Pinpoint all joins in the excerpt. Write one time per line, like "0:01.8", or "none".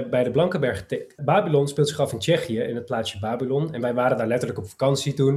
0:01.2